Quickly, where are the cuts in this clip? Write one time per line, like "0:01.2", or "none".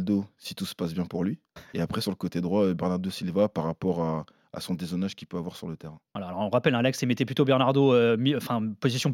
none